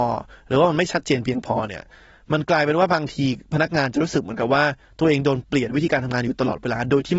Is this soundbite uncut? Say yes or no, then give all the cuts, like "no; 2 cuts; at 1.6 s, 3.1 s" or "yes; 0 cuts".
yes; 0 cuts